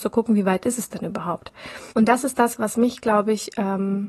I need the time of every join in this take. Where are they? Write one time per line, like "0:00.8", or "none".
0:01.9